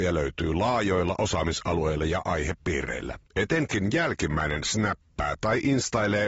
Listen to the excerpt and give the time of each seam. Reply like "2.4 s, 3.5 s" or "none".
3.3 s